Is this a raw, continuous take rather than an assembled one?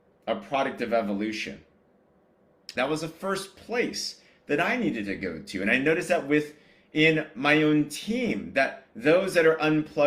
no; 1 cut; at 2.7 s

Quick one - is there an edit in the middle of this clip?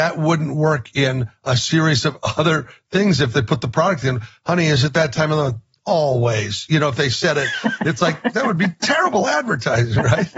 no; 0 cuts

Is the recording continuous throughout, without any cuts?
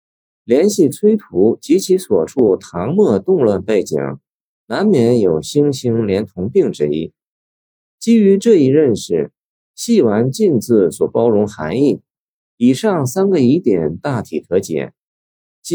yes; 0 cuts

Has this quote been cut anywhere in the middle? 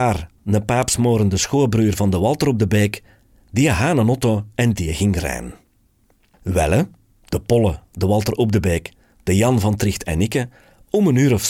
yes; 1 cut; at 7.8 s

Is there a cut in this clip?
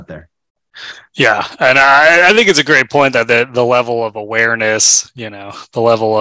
no; 0 cuts

